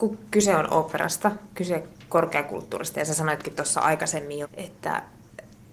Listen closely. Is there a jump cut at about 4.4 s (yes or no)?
yes